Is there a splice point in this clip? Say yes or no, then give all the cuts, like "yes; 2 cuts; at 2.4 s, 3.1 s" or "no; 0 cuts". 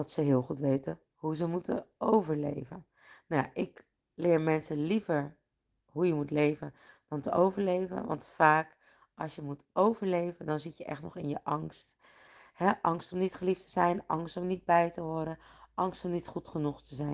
no; 0 cuts